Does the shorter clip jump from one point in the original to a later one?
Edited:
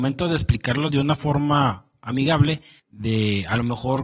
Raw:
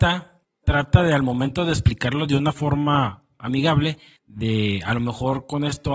no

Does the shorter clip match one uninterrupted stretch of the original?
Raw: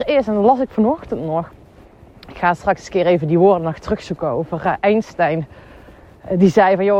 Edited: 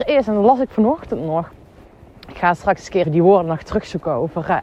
no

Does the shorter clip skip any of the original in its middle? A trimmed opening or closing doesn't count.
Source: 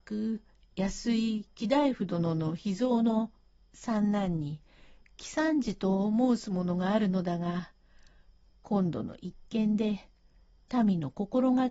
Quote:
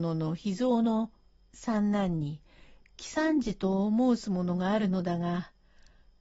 no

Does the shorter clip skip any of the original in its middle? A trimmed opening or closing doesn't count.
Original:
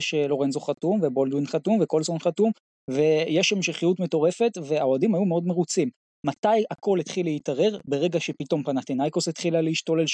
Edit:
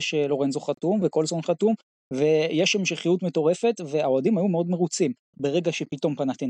yes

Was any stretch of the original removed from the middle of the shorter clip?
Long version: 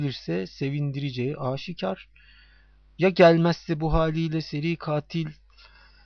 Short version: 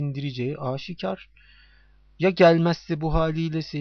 no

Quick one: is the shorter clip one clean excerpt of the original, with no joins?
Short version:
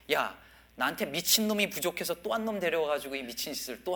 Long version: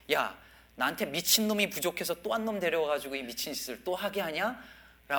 yes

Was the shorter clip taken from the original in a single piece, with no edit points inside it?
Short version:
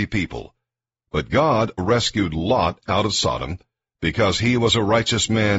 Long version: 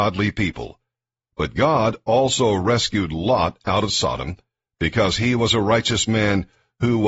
no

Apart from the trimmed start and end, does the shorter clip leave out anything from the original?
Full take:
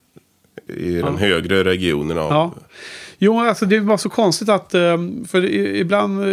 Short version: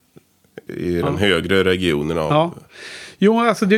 no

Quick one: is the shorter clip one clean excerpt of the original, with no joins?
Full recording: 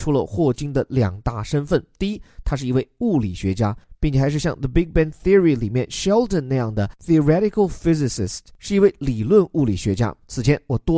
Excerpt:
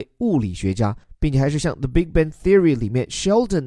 yes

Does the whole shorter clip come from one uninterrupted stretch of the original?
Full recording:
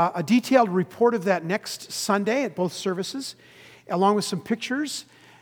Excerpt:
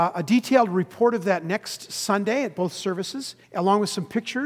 no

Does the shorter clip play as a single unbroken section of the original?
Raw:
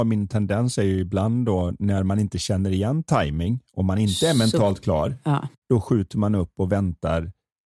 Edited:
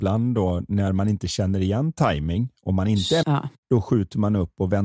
no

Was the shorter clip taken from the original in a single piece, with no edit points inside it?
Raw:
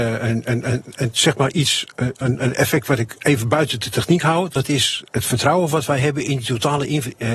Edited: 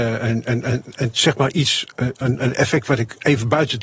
yes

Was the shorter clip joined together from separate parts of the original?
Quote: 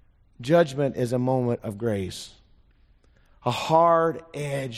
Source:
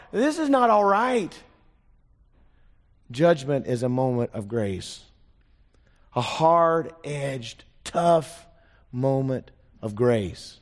no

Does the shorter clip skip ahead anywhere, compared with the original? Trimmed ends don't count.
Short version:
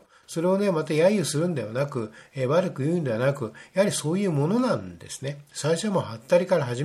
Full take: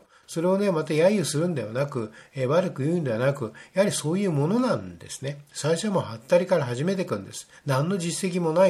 no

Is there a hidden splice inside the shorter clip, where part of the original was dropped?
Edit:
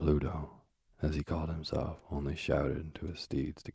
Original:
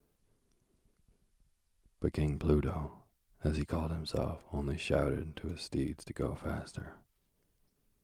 no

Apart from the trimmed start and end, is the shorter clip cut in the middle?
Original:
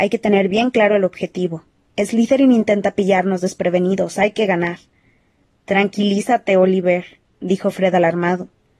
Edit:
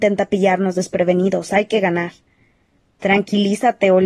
no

